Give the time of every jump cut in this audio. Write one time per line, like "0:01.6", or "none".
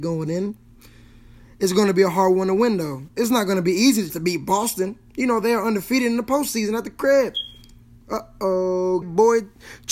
0:04.1
0:09.0